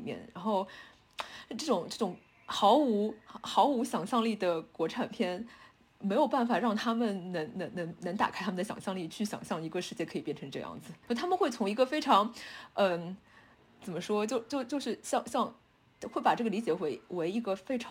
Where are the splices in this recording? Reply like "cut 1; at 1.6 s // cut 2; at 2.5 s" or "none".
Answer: cut 1; at 11.0 s